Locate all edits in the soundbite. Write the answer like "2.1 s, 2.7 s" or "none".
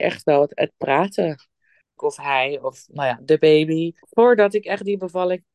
2.0 s, 4.0 s

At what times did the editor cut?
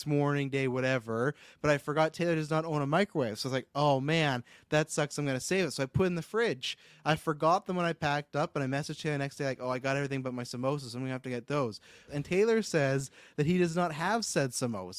12.1 s

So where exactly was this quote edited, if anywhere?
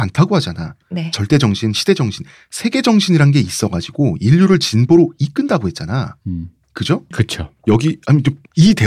7.1 s

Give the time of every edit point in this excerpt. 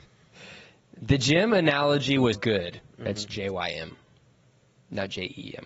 2.3 s

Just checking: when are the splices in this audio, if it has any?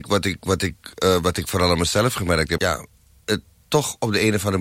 2.6 s

